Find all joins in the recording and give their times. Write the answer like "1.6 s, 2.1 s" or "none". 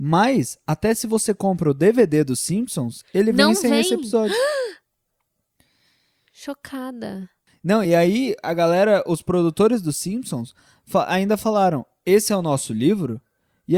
none